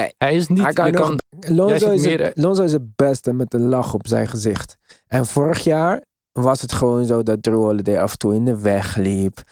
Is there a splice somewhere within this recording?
yes; 1 cut; at 1.2 s

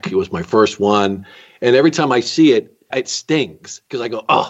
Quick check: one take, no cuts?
no; 1 cut; at 2.9 s

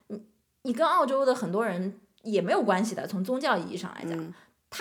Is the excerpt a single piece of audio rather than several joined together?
yes; 0 cuts

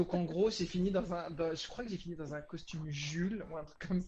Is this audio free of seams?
yes; 0 cuts

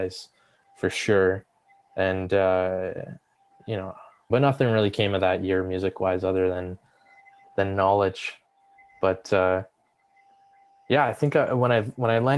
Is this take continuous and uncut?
no; 1 cut; at 4.3 s

